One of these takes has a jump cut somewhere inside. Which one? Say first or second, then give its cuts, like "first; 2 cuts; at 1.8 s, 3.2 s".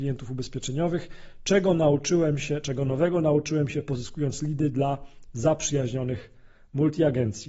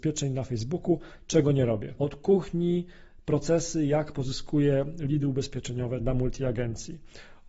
second; 2 cuts; at 2.0 s, 6.0 s